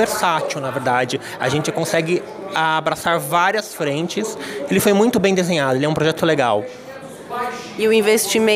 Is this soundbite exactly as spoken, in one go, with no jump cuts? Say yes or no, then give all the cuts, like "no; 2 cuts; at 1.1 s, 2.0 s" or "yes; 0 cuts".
no; 1 cut; at 6.2 s